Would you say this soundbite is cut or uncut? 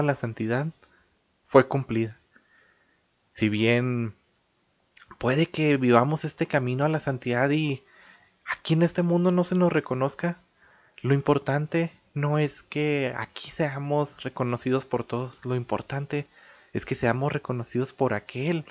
uncut